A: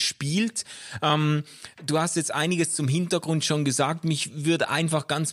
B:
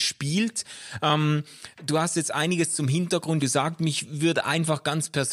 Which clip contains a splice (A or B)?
B